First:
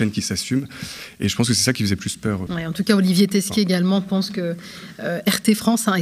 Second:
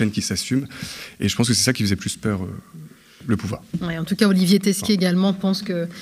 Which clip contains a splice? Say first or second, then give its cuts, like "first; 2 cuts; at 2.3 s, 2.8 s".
first; 1 cut; at 2.5 s